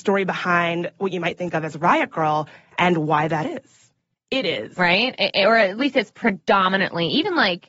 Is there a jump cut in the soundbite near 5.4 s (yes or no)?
no